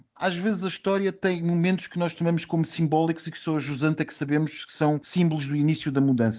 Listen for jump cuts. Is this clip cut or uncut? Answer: uncut